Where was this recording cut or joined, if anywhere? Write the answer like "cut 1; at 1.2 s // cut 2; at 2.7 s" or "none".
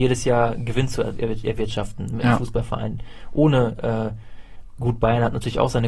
none